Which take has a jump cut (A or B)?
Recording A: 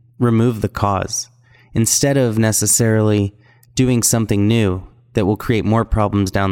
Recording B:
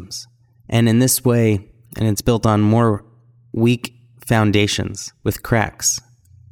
B